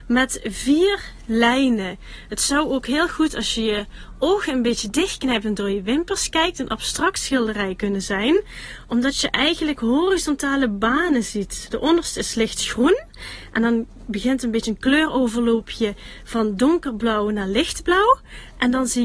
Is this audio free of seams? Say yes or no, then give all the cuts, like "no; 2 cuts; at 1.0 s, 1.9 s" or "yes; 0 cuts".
yes; 0 cuts